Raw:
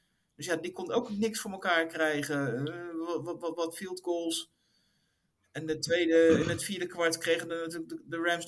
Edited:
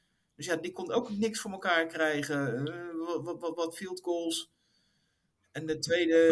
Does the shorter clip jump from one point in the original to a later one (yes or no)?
no